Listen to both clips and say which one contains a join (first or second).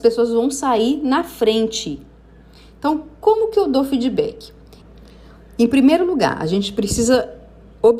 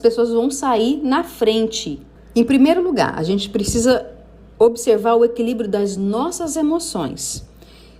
second